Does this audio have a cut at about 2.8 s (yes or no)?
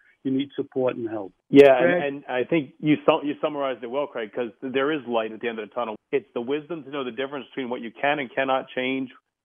no